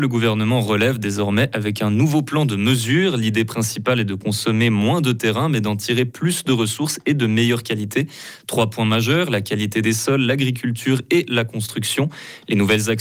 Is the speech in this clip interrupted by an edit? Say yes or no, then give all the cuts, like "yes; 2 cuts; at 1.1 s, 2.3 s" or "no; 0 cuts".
no; 0 cuts